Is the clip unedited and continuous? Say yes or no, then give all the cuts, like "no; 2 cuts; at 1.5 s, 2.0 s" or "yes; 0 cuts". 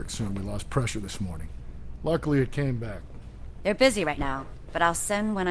yes; 0 cuts